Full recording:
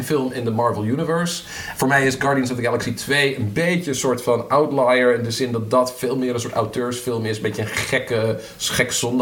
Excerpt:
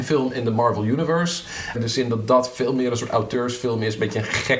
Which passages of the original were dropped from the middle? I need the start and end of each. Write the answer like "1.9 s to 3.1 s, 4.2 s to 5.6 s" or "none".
1.7 s to 5.2 s